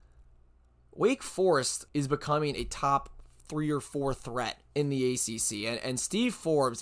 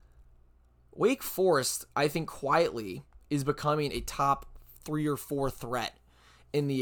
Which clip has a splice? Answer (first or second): first